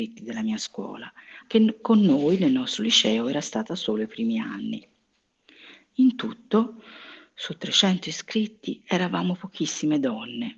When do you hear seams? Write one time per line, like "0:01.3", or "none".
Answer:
0:01.4